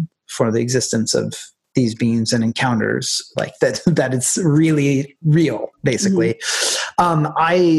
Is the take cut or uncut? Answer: cut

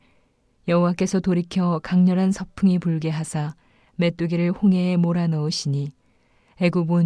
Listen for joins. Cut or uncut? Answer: uncut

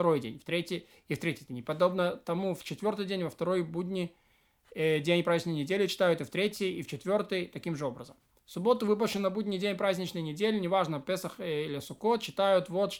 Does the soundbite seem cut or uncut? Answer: cut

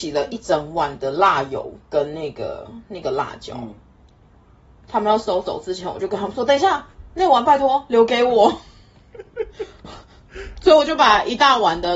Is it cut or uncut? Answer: uncut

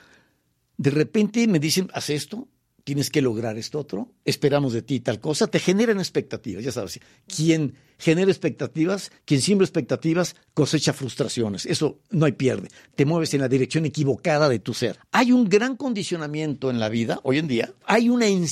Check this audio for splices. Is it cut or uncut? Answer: uncut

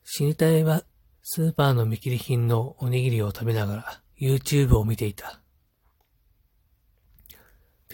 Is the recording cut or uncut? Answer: cut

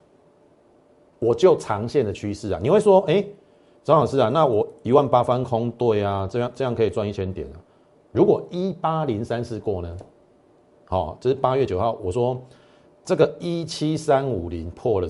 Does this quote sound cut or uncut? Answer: cut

